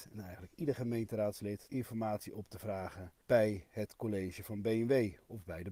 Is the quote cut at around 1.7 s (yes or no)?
yes